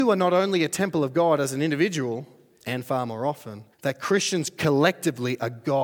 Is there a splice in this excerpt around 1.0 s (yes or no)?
no